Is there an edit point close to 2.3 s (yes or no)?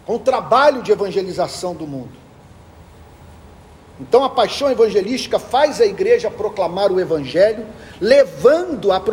no